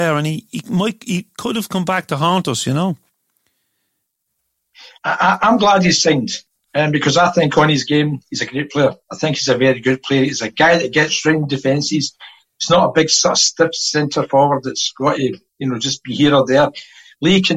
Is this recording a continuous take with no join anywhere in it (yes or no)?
yes